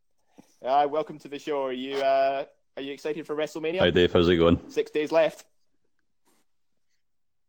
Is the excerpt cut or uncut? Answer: uncut